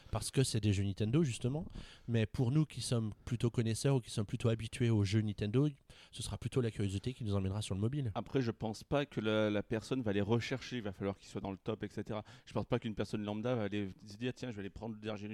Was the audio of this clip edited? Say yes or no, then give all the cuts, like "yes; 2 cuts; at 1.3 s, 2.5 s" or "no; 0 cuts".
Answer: no; 0 cuts